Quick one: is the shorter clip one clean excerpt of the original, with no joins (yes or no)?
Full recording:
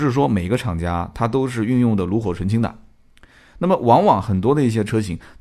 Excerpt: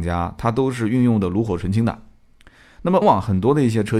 no